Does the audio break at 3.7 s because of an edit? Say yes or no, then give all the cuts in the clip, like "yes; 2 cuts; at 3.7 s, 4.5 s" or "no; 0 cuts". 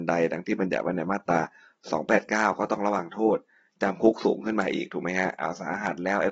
no; 0 cuts